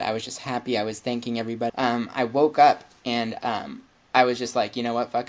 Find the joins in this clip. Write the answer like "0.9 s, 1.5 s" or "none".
1.7 s